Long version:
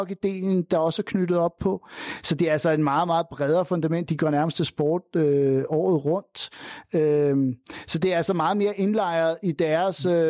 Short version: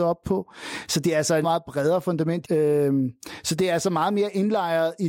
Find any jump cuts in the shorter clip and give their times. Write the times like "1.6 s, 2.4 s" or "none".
1.4 s, 2.4 s

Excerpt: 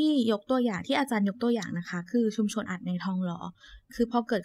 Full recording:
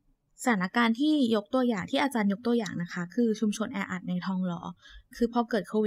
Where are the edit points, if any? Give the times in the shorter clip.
2.7 s

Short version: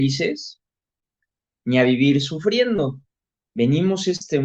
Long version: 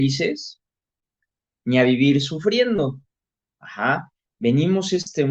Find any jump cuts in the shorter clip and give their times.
3.4 s

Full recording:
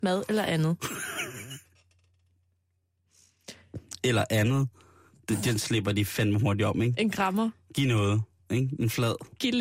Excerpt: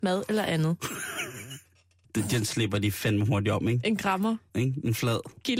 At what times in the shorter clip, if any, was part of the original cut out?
2.0 s, 4.5 s

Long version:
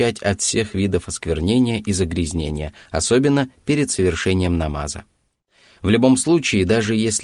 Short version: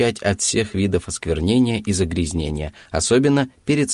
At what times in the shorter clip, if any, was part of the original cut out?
none

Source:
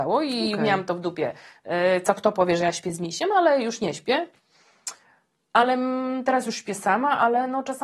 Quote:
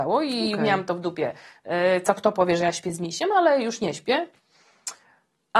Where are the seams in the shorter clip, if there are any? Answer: none

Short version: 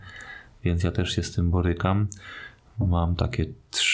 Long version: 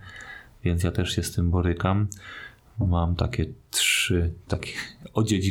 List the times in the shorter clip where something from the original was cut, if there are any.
none

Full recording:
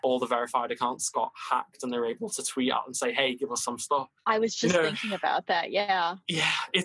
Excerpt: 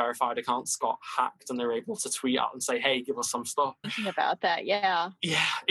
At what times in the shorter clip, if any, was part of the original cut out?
3.8 s

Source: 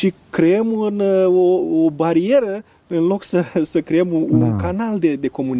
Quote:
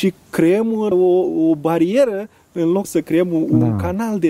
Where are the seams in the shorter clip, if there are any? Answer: 0.9 s, 2.8 s

